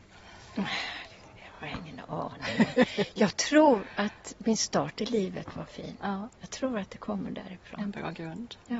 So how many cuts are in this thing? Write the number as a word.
zero